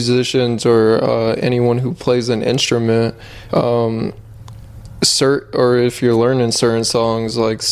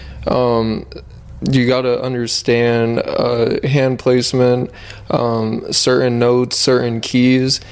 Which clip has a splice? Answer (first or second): first